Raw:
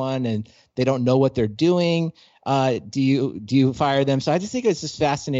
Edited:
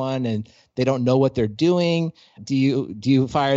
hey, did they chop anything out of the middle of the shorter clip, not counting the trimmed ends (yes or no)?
yes